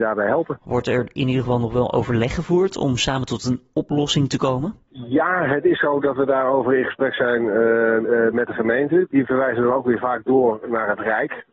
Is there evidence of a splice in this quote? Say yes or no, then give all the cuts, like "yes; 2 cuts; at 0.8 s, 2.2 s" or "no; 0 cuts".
no; 0 cuts